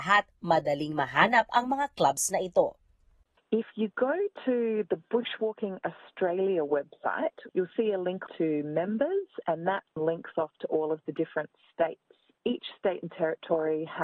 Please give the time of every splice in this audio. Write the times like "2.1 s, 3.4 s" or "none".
7.5 s, 10.0 s